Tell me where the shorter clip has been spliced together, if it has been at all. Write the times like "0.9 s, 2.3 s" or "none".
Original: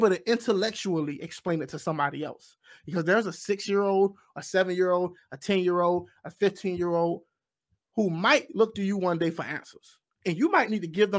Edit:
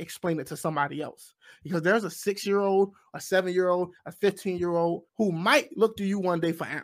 4.0 s, 5.1 s